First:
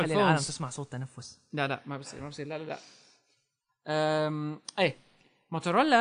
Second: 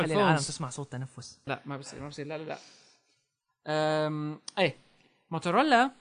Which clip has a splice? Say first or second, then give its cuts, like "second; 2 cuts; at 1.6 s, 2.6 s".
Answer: second; 1 cut; at 1.5 s